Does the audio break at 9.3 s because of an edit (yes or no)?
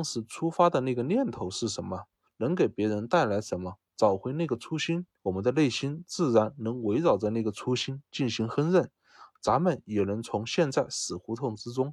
no